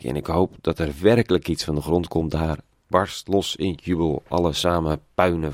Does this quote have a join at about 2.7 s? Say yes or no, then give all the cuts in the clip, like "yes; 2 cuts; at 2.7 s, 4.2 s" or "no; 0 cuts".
yes; 1 cut; at 2.7 s